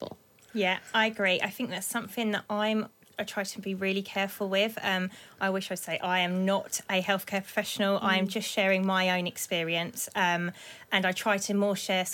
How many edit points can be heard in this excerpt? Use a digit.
0